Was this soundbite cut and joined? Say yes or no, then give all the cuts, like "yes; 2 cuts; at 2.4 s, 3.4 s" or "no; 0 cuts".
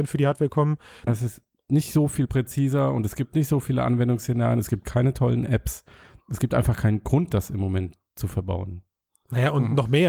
yes; 1 cut; at 1.1 s